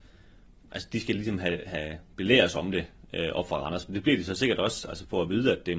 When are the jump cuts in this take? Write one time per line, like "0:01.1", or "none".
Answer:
none